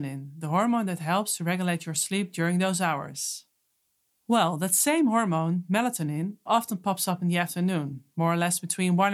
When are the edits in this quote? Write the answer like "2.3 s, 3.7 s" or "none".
6.5 s